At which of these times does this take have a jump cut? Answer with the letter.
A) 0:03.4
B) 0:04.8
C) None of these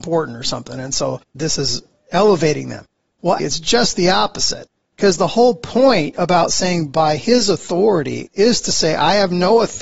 A